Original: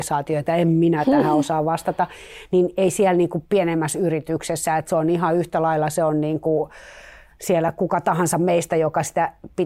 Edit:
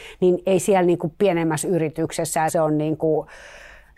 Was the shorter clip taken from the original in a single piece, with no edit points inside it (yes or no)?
no